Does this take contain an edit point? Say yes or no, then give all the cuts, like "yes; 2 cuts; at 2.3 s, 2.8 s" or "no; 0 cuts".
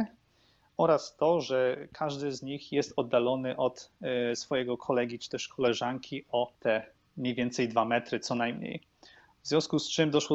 yes; 1 cut; at 6.5 s